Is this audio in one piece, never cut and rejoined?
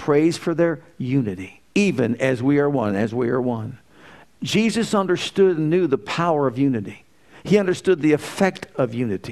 no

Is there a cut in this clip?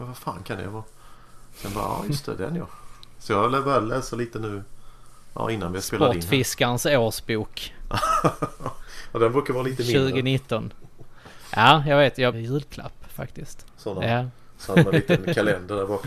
yes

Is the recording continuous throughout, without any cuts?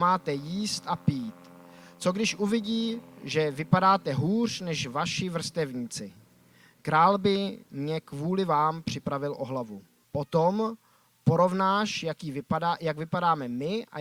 no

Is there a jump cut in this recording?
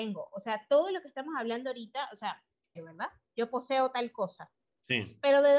yes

